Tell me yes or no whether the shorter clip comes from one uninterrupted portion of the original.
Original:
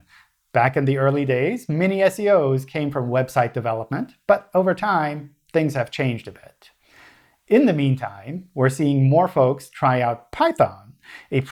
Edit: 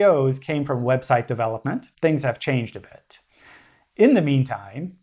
no